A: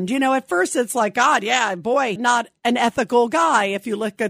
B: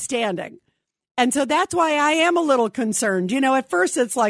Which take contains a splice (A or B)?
A